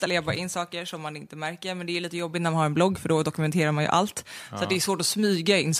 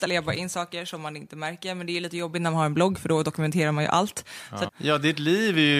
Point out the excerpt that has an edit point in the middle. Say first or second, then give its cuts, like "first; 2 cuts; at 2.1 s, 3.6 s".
second; 1 cut; at 4.7 s